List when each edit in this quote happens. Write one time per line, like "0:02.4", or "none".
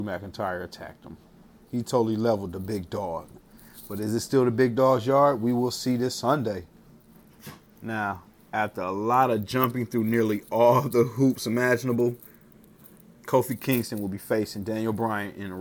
0:07.8